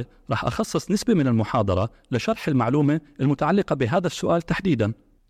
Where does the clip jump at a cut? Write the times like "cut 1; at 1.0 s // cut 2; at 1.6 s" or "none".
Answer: none